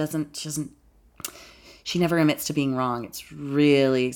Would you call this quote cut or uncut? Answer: uncut